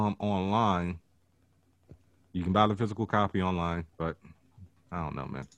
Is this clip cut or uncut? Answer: cut